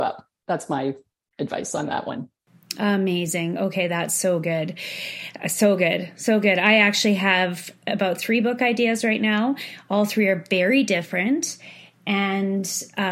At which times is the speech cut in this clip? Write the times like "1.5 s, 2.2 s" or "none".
none